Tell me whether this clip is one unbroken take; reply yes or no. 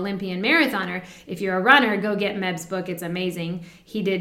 yes